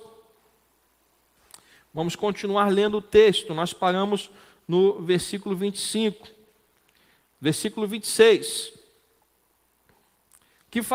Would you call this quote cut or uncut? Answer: uncut